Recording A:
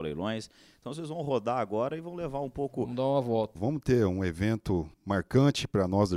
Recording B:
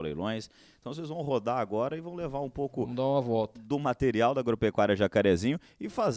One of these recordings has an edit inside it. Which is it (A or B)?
A